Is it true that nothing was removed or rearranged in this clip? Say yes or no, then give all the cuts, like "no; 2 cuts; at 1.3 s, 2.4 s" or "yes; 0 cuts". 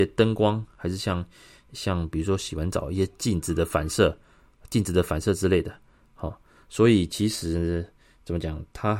yes; 0 cuts